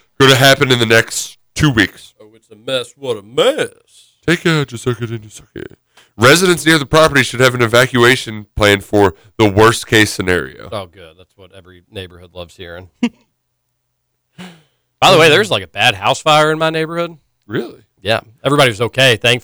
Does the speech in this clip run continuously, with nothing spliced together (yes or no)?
yes